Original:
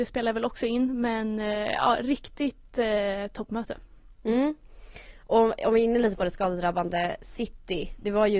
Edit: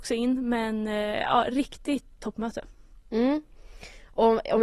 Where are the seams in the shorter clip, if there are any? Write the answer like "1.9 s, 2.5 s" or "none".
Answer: 2.2 s